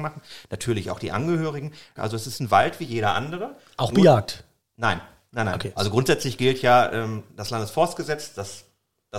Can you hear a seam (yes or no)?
yes